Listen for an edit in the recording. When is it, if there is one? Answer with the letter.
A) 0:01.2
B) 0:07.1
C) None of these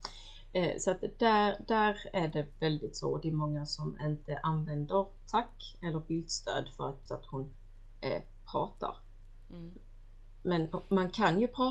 B